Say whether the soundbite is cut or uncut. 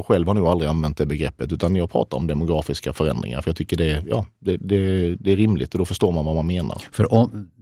uncut